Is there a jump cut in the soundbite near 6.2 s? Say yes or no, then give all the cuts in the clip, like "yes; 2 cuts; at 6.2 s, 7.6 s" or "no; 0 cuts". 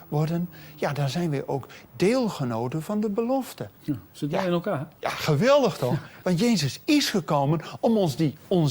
yes; 2 cuts; at 3.8 s, 6.2 s